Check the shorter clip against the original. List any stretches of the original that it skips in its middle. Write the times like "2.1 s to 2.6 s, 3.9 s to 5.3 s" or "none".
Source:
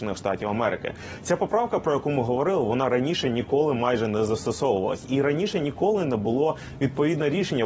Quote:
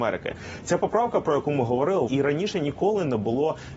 2.7 s to 5.1 s